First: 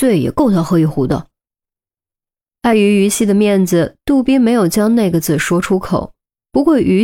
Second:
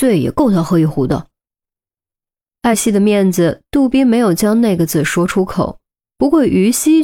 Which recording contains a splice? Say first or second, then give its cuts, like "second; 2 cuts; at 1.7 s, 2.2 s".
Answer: second; 1 cut; at 2.7 s